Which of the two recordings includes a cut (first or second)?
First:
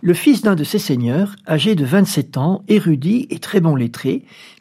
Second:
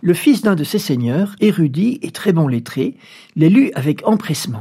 second